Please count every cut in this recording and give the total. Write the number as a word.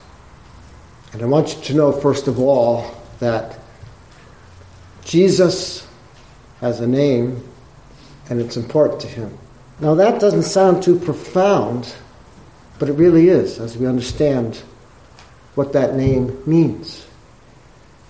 one